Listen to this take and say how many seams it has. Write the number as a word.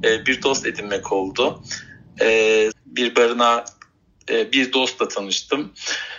one